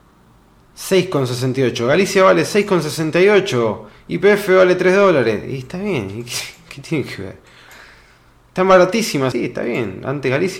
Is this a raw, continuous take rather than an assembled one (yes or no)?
no